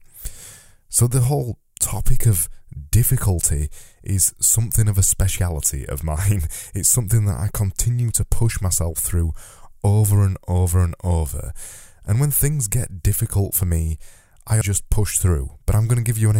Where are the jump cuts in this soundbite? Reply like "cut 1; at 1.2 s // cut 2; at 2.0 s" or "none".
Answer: cut 1; at 14.6 s